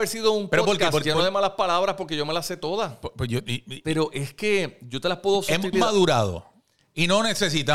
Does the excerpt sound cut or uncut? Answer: cut